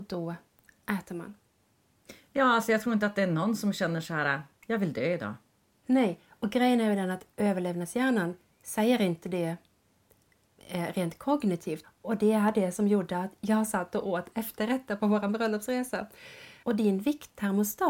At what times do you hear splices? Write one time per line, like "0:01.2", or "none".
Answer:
0:05.8
0:11.8
0:16.6